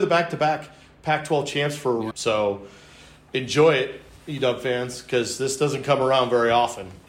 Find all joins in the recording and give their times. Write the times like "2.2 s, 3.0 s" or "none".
2.1 s